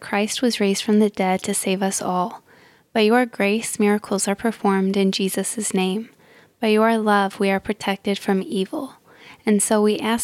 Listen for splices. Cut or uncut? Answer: uncut